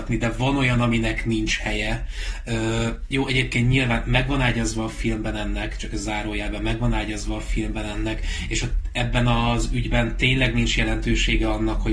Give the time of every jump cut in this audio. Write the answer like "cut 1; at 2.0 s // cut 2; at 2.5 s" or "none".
none